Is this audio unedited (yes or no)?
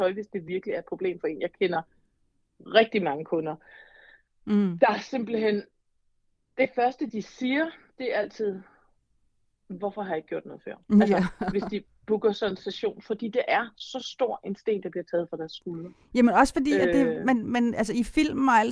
yes